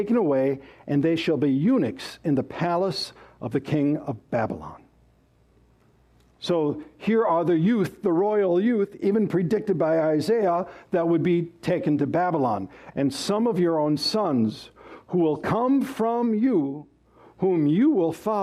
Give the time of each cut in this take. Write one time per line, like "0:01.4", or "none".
0:12.9